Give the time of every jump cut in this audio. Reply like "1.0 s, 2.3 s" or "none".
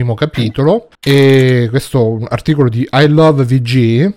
0.9 s